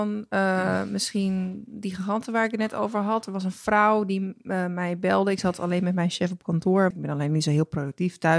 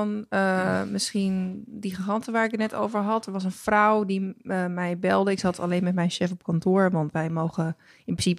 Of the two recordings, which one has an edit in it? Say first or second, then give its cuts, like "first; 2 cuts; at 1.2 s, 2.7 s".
first; 1 cut; at 6.9 s